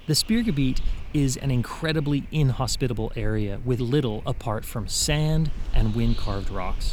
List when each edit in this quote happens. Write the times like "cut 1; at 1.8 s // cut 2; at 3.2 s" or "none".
cut 1; at 3.8 s